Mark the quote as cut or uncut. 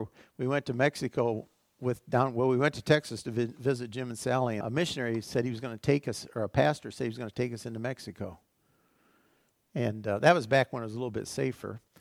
cut